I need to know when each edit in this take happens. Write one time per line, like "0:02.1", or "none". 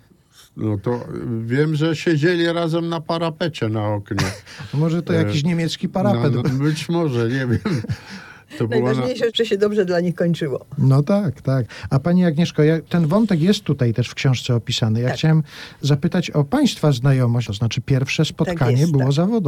0:06.4
0:17.5